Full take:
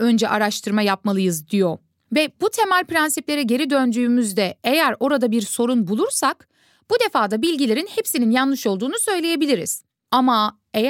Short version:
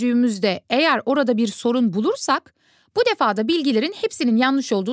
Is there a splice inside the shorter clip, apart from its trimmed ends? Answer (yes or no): no